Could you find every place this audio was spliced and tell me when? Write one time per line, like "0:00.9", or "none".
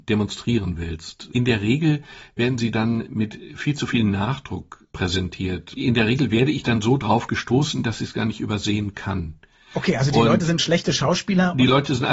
none